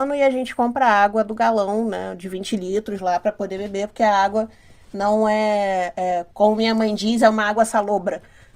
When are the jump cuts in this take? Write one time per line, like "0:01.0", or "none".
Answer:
0:06.3